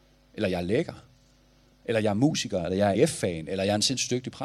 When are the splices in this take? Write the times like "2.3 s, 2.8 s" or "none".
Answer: 2.9 s